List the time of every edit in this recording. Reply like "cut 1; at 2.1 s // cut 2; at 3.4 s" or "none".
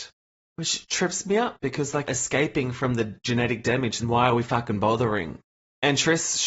cut 1; at 2.0 s // cut 2; at 4.0 s